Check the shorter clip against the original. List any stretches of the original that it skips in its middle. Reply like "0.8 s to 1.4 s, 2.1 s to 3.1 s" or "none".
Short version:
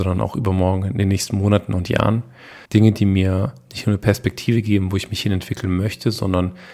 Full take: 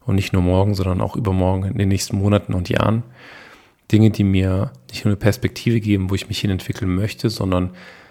3.5 s to 3.8 s

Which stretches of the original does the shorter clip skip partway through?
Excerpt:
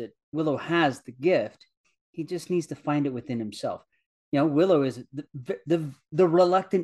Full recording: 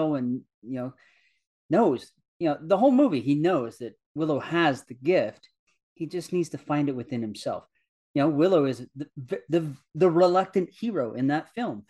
none

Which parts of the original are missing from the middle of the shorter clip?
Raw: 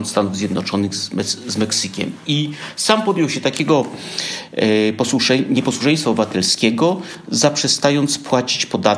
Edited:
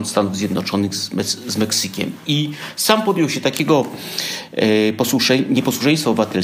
none

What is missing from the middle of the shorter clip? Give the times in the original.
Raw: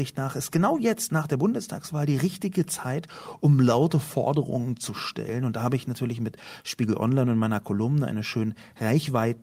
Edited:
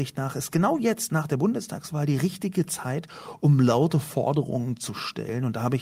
none

